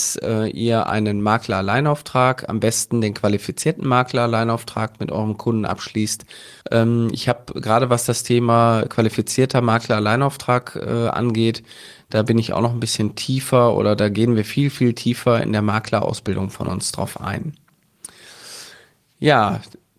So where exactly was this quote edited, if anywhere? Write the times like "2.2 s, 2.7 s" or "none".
6.6 s